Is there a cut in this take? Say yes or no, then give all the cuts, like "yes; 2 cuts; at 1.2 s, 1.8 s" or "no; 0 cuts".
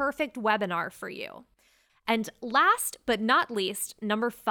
yes; 1 cut; at 1.9 s